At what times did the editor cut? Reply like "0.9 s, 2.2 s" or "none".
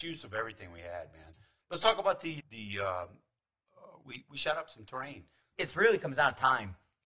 2.4 s, 5.5 s